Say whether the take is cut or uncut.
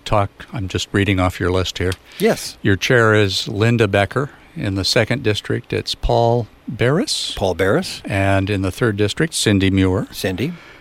uncut